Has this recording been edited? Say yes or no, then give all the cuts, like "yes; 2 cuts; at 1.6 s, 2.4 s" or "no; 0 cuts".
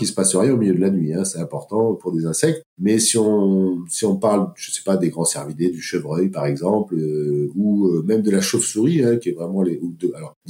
no; 0 cuts